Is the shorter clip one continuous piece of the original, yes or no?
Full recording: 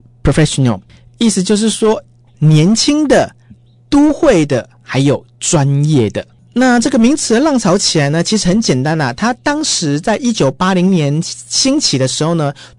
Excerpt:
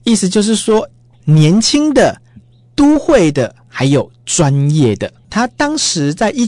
no